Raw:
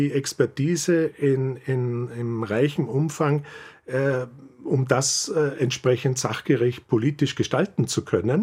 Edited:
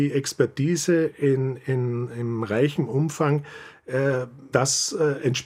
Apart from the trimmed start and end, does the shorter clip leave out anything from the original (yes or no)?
yes